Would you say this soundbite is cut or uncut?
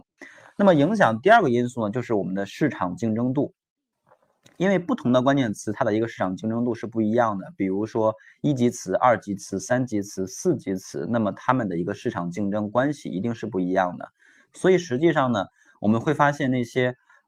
uncut